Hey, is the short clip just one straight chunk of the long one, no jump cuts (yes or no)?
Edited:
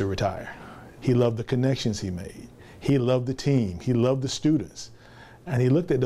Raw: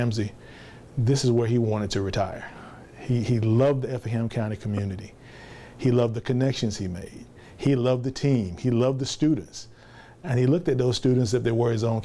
no